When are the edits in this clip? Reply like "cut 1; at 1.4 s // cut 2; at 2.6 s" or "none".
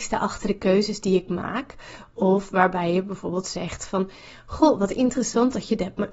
none